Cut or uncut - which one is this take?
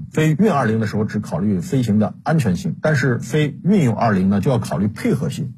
uncut